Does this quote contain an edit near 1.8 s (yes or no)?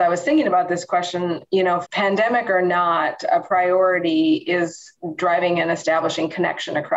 yes